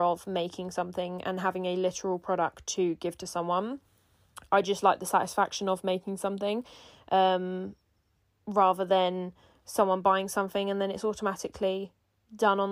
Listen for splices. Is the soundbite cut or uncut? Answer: uncut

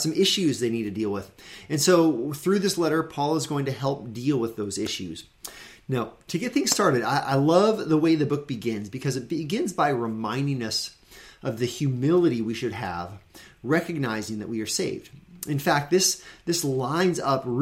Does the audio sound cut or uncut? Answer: uncut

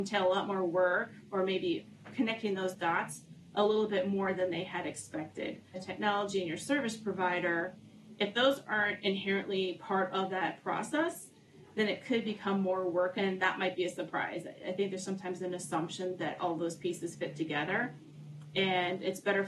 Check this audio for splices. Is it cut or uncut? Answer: cut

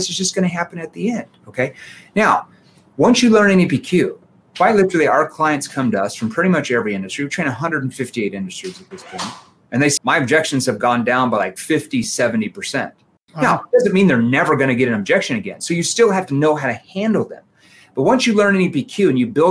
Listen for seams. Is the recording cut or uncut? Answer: cut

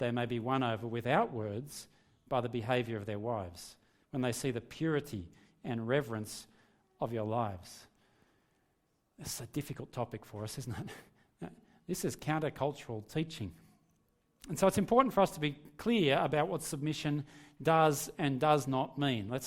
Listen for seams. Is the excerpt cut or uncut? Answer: uncut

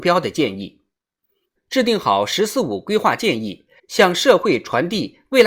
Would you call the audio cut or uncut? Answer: cut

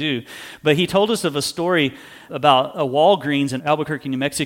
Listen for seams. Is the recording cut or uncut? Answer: cut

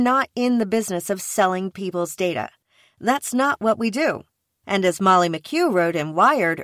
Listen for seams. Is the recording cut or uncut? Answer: cut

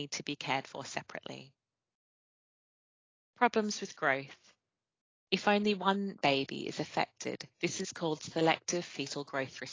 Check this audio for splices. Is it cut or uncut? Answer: cut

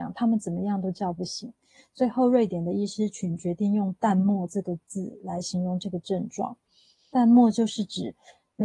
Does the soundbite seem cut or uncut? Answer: uncut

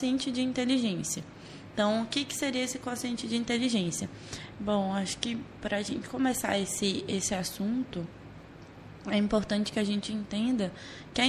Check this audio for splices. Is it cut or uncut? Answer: cut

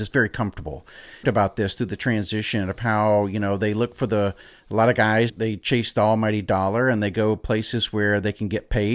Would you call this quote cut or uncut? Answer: cut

